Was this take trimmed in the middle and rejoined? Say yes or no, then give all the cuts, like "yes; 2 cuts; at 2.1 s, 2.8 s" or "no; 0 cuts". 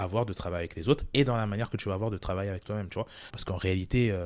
yes; 1 cut; at 3.3 s